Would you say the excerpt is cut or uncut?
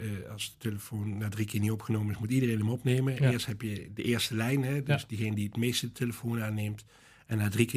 uncut